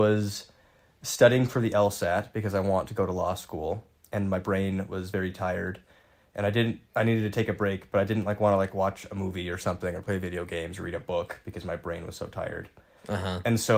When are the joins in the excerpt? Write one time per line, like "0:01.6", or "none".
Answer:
none